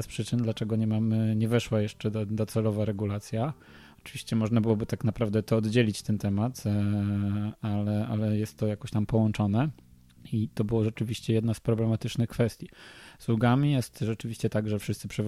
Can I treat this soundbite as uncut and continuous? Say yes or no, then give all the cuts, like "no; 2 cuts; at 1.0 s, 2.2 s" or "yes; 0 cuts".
yes; 0 cuts